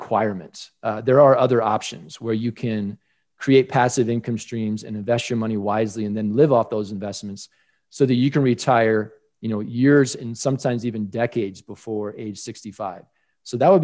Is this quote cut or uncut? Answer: uncut